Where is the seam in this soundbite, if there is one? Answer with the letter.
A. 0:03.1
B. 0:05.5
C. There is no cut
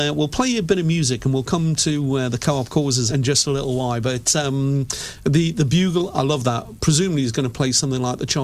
A